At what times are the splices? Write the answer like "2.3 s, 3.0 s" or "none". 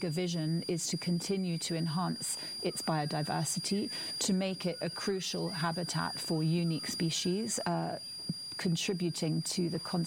7.6 s

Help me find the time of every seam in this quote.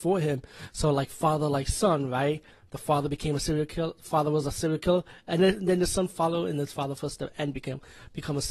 none

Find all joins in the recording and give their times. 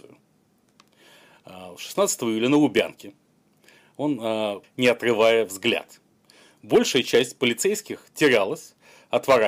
4.6 s

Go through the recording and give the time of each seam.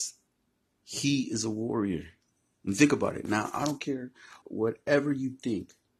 4.4 s

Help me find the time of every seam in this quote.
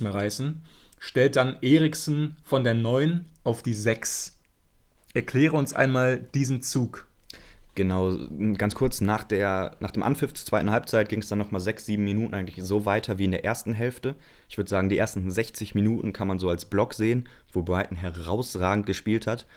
none

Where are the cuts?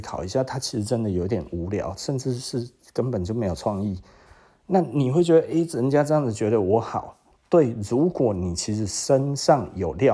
none

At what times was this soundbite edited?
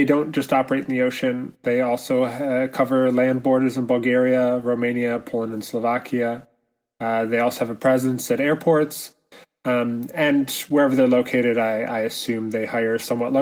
none

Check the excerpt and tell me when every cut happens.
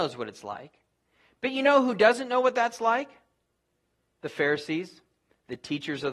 none

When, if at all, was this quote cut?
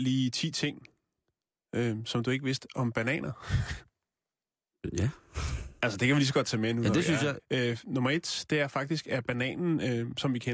7.4 s

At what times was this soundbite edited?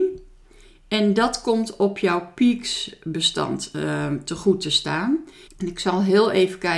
5.5 s

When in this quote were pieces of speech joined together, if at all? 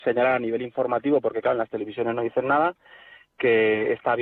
none

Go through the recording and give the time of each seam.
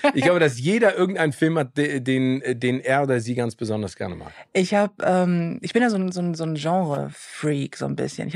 none

